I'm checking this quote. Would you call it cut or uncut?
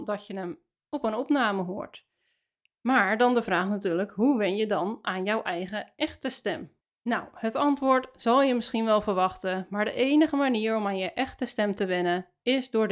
uncut